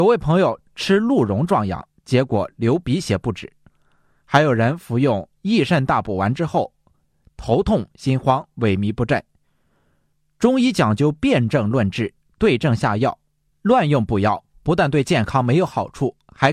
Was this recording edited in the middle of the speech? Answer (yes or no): yes